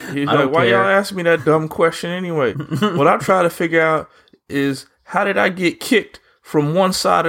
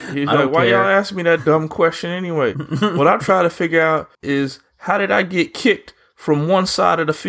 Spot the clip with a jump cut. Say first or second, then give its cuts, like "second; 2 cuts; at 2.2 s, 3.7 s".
second; 1 cut; at 4.1 s